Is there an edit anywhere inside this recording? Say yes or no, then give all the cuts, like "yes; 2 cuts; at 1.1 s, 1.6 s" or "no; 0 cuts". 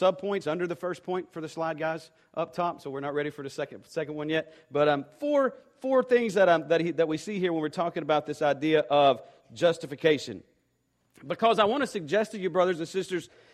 no; 0 cuts